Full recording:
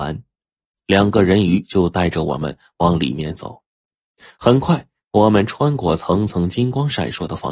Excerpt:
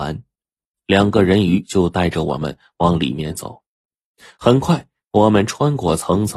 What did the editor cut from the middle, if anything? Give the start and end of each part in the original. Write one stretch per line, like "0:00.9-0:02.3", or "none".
none